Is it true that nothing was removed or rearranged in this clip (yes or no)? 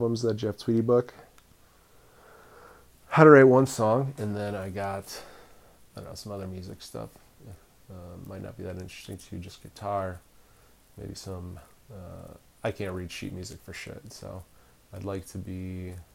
yes